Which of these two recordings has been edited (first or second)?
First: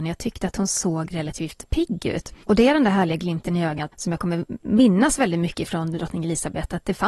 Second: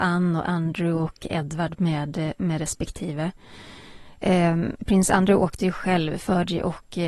first